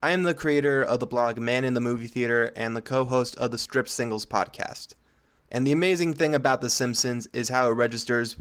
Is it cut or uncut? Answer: cut